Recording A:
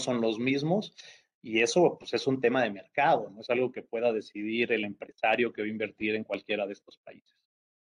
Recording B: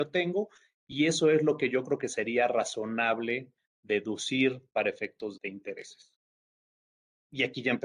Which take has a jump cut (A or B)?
B